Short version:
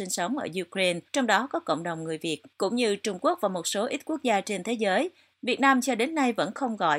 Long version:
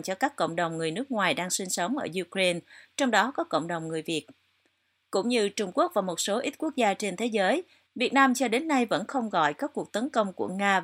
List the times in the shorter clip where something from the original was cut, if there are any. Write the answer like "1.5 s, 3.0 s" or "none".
1.1 s, 2.5 s